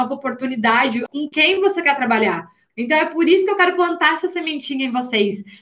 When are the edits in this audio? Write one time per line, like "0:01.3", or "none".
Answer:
0:01.1
0:02.7